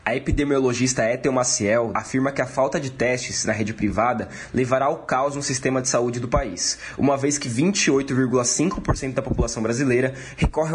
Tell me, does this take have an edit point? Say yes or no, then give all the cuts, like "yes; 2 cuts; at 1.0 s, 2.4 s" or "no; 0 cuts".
yes; 1 cut; at 1.9 s